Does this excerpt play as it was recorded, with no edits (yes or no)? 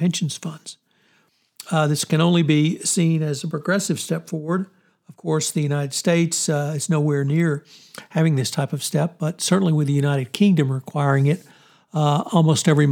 yes